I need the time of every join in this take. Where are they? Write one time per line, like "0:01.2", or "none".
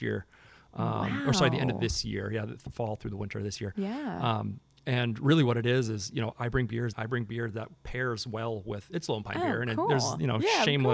0:06.9